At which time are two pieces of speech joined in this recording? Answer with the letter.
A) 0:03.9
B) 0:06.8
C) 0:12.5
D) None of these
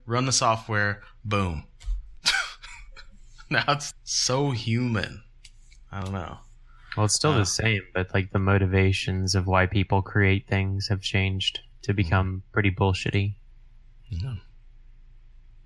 A